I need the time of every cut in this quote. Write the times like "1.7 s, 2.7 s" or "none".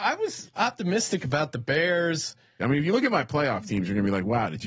2.6 s